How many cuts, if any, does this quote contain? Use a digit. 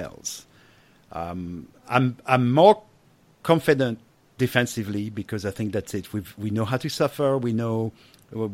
0